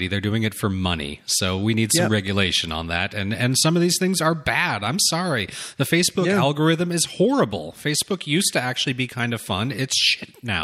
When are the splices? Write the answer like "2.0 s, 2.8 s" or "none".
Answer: none